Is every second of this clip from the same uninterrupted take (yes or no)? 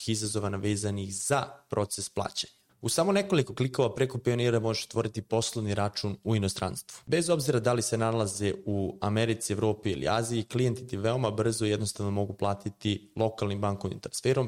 yes